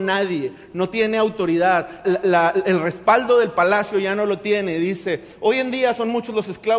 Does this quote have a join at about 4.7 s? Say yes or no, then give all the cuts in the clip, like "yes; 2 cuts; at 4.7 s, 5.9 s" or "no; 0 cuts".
no; 1 cut; at 2.0 s